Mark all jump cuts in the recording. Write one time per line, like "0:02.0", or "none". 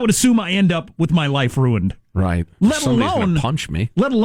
none

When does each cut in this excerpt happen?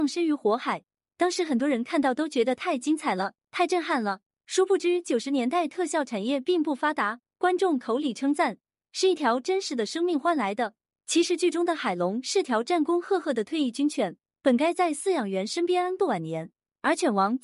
none

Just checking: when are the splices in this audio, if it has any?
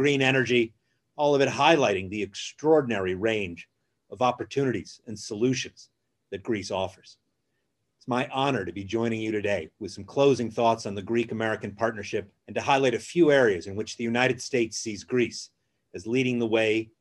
0:12.4

